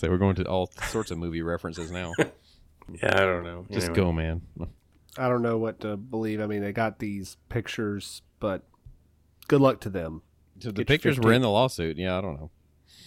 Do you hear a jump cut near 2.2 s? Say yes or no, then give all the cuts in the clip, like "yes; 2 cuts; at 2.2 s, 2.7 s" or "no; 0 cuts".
no; 0 cuts